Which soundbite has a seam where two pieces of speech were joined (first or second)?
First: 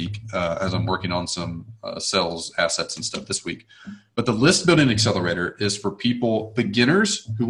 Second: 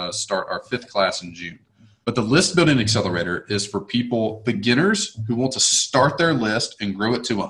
second